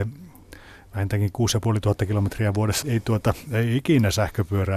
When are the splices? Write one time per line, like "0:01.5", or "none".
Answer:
0:02.8